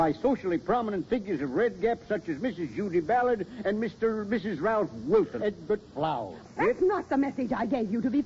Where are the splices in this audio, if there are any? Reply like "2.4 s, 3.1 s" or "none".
5.4 s, 6.4 s